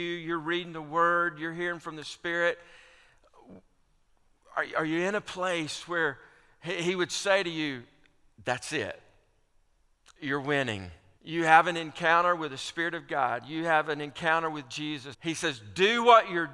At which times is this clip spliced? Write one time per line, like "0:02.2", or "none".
0:11.2
0:15.1